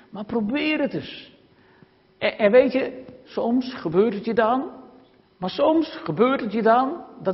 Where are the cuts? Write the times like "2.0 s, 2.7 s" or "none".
3.2 s, 5.2 s